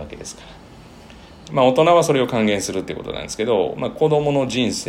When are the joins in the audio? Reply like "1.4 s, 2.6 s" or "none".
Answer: 1.5 s, 3.8 s